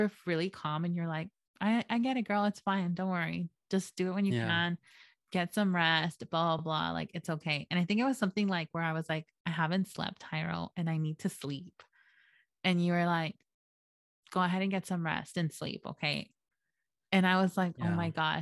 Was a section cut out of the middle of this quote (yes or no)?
no